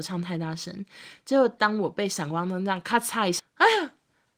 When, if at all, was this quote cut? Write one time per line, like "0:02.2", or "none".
0:03.4